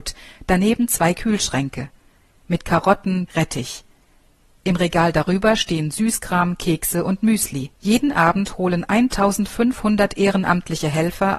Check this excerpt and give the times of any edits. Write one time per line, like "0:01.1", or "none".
0:03.3
0:07.7